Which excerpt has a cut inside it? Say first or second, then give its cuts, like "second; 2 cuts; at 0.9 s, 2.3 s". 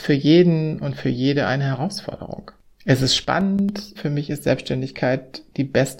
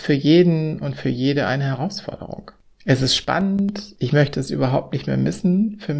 first; 1 cut; at 4.0 s